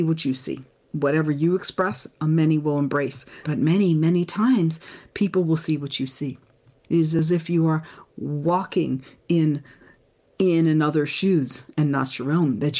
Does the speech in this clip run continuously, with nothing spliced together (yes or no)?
no